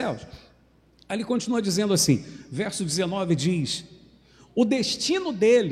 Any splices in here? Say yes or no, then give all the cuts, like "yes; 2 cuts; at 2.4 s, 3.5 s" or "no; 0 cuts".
no; 0 cuts